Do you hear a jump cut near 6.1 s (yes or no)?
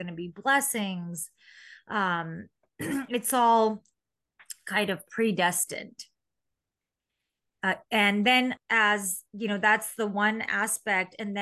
no